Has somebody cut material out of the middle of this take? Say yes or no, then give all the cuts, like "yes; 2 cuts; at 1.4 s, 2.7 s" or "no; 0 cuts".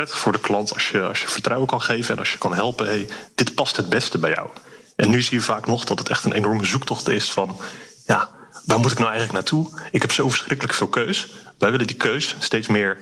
no; 0 cuts